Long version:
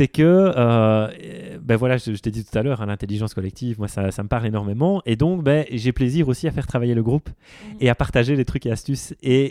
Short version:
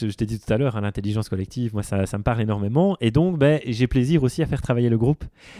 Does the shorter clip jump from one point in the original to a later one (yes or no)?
no